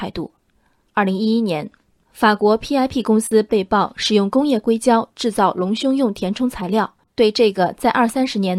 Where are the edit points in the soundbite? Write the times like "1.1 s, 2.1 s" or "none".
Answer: 7.0 s